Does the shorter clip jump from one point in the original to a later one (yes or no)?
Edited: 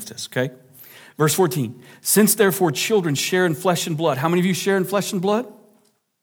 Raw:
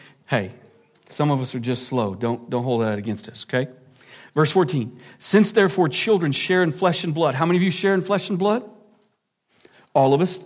no